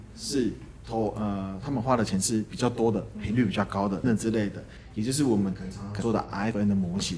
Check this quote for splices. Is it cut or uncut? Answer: cut